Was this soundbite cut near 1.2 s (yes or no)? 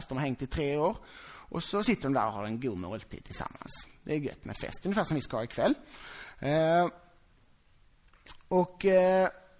no